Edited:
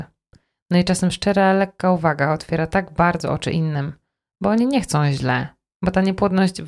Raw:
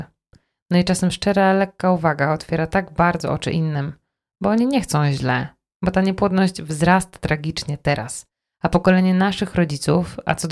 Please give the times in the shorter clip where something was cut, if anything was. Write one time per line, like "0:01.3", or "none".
none